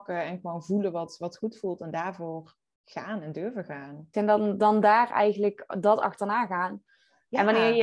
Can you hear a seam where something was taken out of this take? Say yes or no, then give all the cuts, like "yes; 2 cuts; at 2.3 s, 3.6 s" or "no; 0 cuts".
yes; 1 cut; at 4.1 s